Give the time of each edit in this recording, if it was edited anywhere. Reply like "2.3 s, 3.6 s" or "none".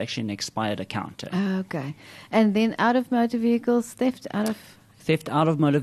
none